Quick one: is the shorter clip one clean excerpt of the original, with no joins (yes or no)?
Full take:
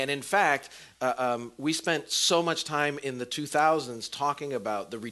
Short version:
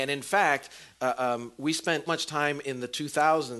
no